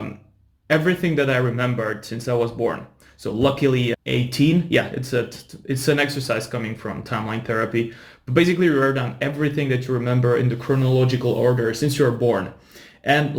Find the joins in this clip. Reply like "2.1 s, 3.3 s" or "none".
3.9 s